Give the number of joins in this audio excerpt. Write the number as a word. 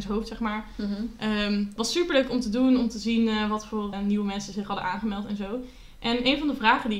one